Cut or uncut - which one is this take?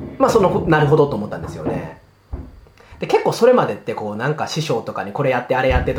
uncut